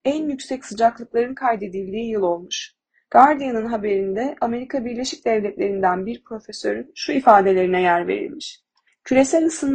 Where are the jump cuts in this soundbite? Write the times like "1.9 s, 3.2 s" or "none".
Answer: none